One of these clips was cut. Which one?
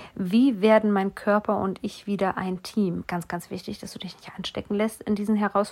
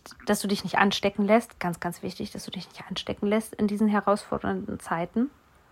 first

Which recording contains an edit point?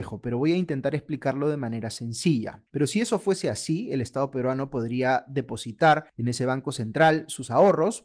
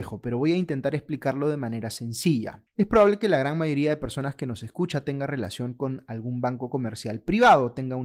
first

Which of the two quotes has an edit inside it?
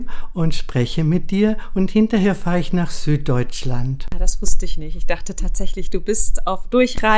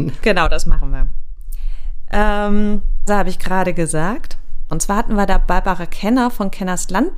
second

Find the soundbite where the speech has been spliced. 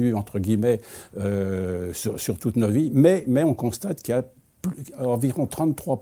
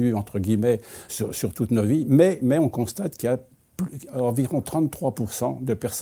second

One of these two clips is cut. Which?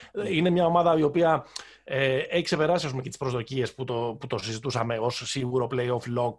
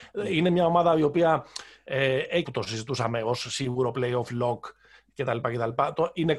second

